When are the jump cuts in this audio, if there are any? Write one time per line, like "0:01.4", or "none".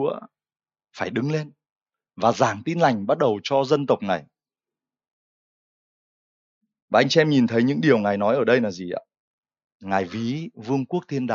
none